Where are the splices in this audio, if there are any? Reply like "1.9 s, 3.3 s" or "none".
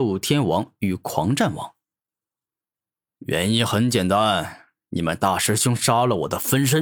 3.1 s